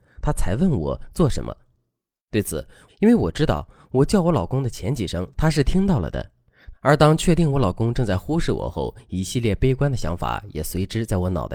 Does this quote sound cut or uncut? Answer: cut